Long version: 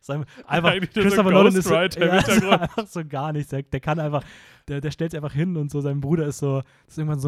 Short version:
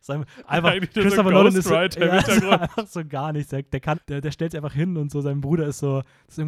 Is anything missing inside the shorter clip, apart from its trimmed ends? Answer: yes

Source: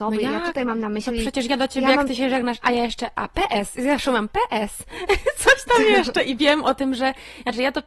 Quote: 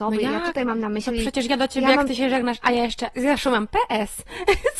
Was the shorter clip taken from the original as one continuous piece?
no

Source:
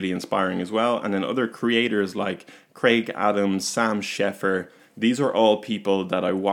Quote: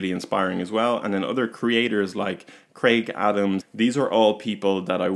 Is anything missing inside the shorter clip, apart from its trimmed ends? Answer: yes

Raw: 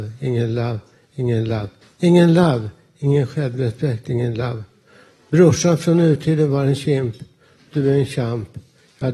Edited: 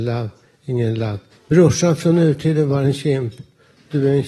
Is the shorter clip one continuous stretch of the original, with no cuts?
no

